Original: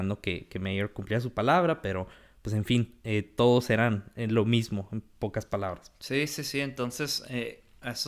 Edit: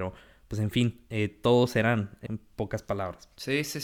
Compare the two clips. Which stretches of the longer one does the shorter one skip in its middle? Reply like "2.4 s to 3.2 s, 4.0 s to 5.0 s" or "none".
4.2 s to 4.9 s